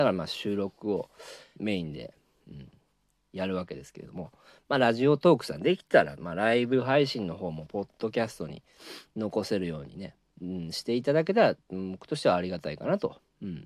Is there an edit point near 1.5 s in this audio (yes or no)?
yes